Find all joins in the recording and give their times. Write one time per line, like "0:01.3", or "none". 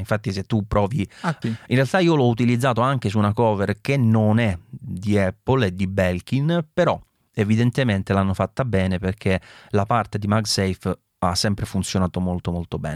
0:01.4

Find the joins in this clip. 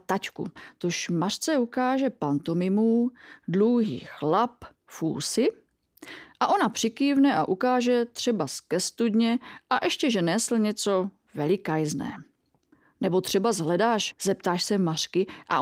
0:14.1

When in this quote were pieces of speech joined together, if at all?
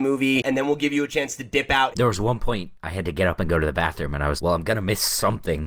0:01.9
0:04.4

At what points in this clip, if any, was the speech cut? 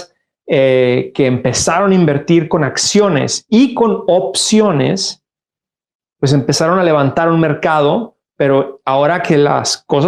none

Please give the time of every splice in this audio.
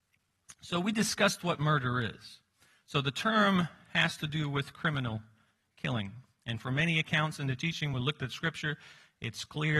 none

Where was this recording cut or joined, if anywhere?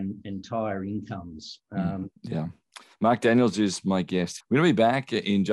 0:02.2
0:04.4

